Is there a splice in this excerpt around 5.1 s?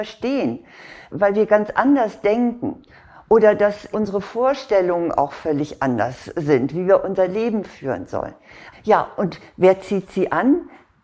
no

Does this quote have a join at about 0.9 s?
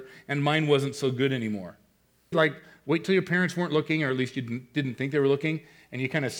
no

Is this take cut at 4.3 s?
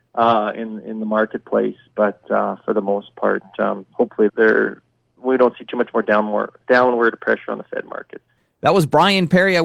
yes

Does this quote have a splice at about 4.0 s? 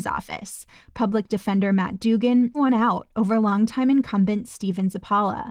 no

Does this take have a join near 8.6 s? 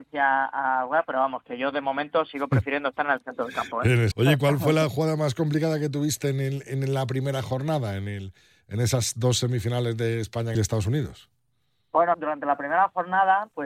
no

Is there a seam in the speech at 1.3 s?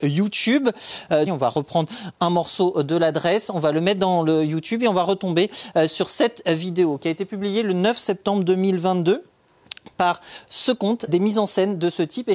yes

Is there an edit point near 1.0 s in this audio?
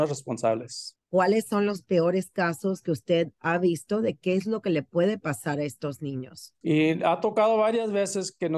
yes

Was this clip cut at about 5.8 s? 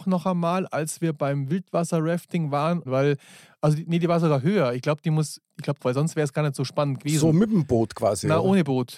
yes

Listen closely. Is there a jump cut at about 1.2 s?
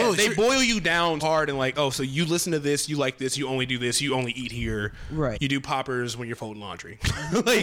yes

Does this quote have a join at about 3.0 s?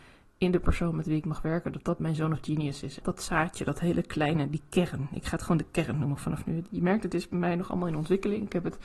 yes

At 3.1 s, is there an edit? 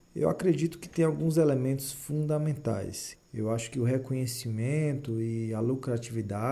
yes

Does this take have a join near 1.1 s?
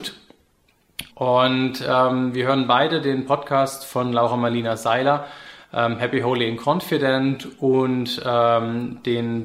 yes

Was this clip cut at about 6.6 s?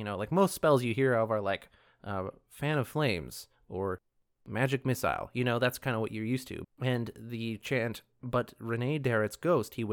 yes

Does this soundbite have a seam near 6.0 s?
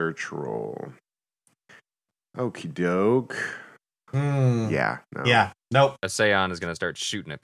yes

